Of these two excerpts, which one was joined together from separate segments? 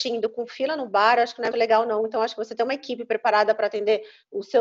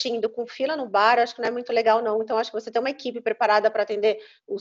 first; 1 cut; at 1.5 s

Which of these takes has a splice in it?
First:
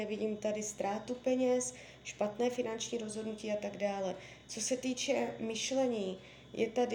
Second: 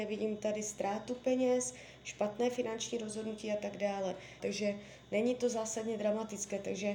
second; 1 cut; at 4.4 s

